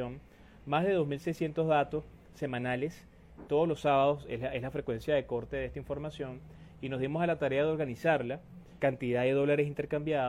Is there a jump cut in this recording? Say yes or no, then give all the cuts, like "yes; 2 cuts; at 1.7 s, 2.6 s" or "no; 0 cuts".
yes; 2 cuts; at 3.5 s, 8.8 s